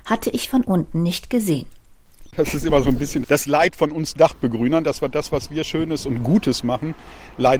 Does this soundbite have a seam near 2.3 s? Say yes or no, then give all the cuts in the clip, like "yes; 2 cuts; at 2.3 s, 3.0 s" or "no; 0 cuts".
yes; 1 cut; at 2.3 s